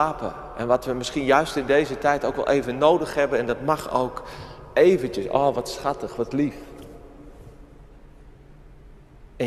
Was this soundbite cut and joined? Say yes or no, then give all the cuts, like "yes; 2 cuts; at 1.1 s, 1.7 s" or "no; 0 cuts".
no; 0 cuts